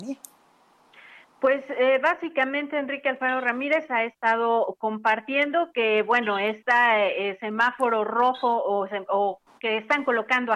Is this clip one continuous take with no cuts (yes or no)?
yes